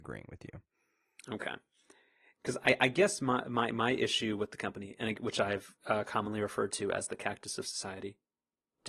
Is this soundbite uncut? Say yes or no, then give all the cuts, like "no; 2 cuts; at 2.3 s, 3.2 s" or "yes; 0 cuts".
yes; 0 cuts